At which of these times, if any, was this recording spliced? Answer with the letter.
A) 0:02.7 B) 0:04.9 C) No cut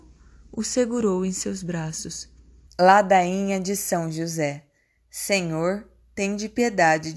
A